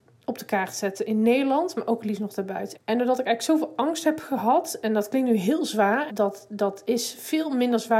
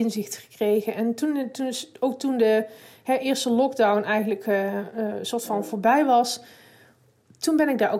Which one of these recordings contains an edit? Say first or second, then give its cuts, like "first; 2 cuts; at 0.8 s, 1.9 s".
first; 2 cuts; at 2.7 s, 6.1 s